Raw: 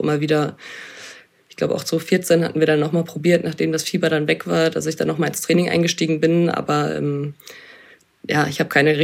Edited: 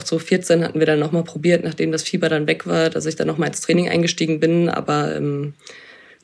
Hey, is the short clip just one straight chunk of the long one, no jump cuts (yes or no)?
yes